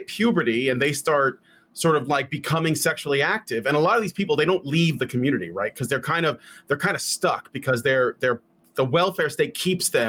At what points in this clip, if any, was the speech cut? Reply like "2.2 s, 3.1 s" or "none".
none